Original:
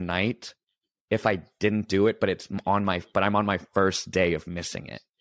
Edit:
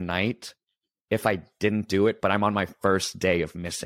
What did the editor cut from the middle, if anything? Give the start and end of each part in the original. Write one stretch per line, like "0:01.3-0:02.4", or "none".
0:02.2-0:03.1